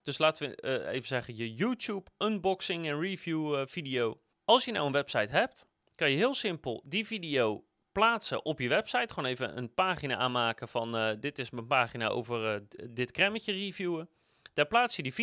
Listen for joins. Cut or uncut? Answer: uncut